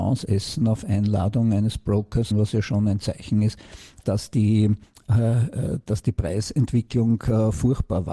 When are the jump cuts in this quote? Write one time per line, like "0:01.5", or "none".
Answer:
0:02.3
0:04.0